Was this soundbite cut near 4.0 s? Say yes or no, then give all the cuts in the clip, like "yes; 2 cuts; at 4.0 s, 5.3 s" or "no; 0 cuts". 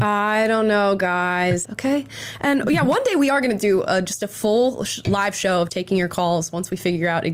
no; 2 cuts; at 1.6 s, 5.7 s